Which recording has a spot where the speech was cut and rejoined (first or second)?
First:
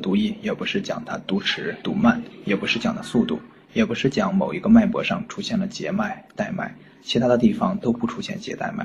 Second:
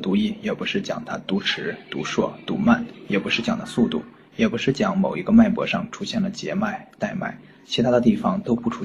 first